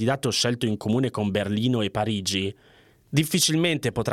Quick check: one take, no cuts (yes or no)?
yes